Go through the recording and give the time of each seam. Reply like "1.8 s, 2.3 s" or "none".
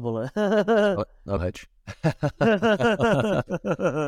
1.4 s